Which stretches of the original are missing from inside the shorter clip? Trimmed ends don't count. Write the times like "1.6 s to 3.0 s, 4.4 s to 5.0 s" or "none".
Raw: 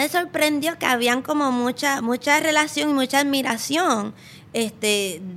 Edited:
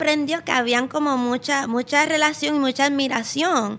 none

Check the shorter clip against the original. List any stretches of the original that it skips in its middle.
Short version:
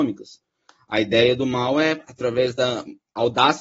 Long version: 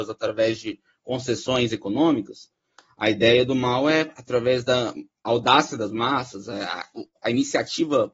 none

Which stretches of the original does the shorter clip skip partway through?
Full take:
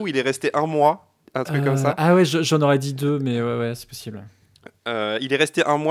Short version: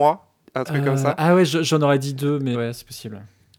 3.3 s to 3.6 s

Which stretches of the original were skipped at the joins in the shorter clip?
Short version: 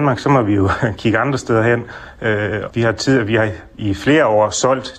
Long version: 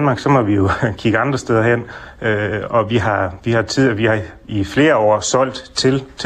2.7 s to 3.4 s

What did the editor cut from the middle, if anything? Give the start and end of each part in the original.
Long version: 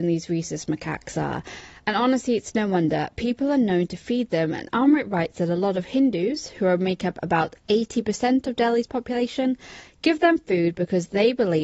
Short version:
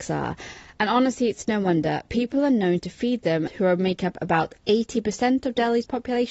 4.5 s to 6.5 s

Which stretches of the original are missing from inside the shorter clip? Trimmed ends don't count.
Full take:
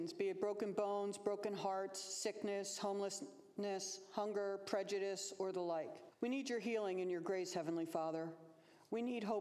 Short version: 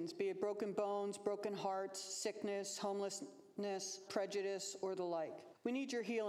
4.1 s to 4.6 s

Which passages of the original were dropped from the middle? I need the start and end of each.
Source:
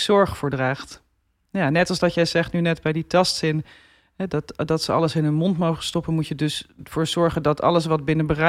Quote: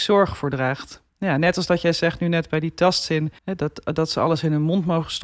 1.1 s to 1.4 s, 3.7 s to 4.1 s

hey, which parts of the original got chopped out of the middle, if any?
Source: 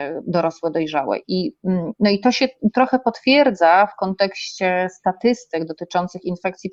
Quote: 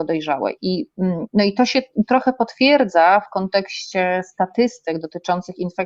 none

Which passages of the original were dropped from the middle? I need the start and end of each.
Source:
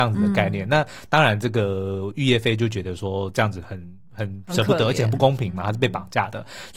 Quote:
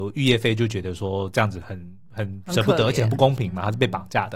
none

